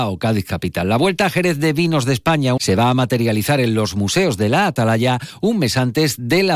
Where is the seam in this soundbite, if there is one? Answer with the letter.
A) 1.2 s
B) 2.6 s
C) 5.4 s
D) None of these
B